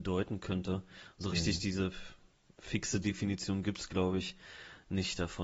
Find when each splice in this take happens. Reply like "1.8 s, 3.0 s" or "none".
none